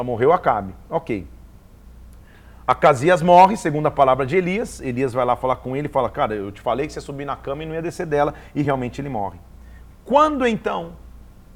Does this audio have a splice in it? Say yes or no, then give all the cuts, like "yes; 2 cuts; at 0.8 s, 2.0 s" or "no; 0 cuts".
no; 0 cuts